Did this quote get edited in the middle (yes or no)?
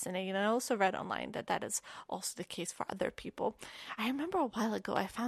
no